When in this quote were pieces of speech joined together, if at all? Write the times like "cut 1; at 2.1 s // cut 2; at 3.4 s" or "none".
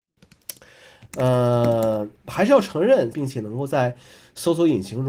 cut 1; at 1.1 s // cut 2; at 3.1 s